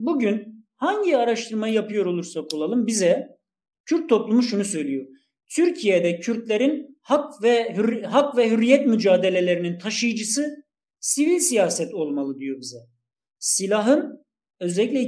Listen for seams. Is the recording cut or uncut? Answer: uncut